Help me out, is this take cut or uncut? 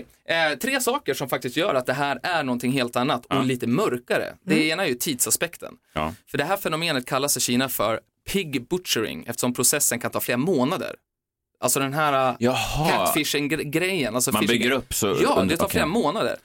uncut